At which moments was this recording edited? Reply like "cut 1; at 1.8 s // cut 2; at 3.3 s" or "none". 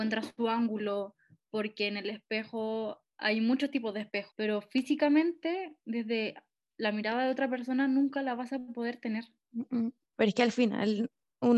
cut 1; at 4.3 s // cut 2; at 10.1 s